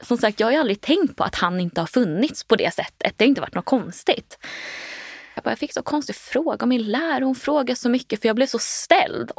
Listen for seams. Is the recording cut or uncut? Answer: cut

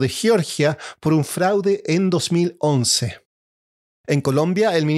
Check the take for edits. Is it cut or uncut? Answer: cut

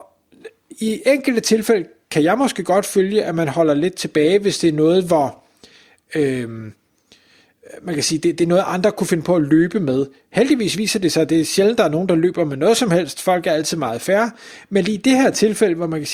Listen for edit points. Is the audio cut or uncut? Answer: uncut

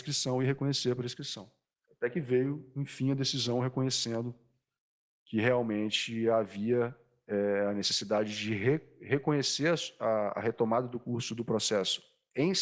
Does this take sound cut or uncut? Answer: cut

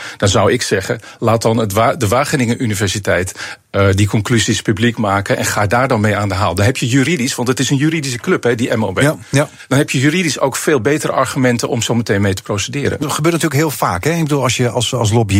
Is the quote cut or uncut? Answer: cut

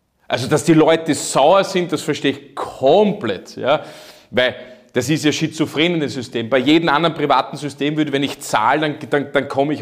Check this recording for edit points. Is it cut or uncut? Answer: uncut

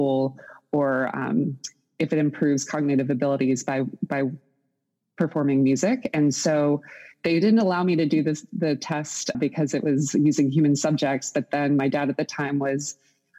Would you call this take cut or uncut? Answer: cut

